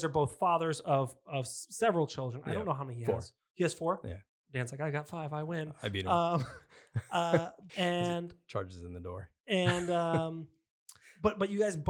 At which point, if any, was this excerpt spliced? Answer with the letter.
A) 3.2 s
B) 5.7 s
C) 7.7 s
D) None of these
C